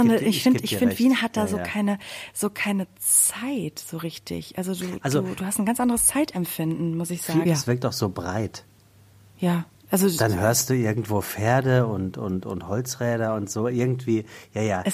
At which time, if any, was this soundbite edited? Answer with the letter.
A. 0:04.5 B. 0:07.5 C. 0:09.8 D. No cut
B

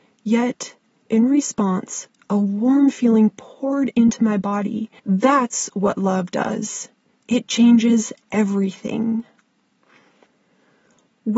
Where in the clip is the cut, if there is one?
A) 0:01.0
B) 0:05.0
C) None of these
B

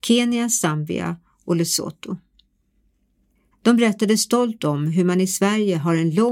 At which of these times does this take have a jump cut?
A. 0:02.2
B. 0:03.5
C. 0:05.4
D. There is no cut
B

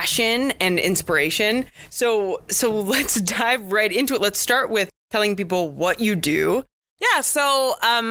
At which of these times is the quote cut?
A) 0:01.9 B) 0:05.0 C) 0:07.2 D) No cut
B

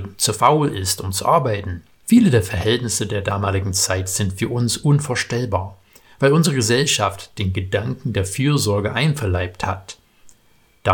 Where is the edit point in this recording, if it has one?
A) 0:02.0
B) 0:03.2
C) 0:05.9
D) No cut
A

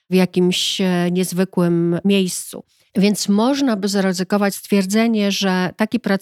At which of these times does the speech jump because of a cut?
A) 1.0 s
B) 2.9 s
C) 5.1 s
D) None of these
B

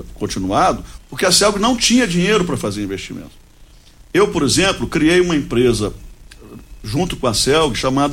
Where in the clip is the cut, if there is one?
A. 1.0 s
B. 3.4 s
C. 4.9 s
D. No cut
A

